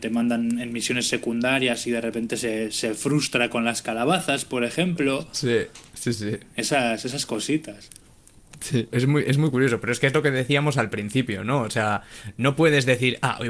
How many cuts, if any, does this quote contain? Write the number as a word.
one